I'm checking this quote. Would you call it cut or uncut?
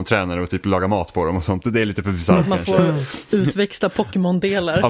uncut